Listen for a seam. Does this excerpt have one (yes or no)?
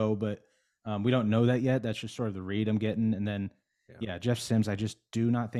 no